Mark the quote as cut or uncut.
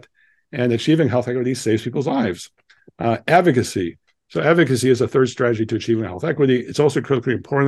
uncut